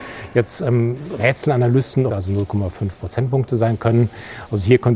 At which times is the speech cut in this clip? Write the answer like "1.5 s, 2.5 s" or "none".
2.1 s